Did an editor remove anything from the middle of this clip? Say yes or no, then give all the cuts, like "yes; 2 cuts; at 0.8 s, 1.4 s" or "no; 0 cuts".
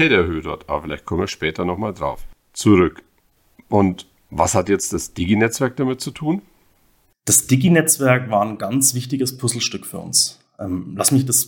no; 0 cuts